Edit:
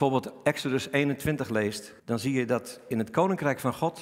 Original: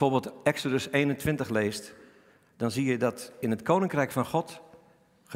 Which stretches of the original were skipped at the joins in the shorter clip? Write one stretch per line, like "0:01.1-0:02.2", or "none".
0:02.0-0:02.5